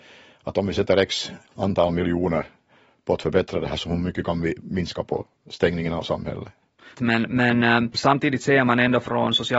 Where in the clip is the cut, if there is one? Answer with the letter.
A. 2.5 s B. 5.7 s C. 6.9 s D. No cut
C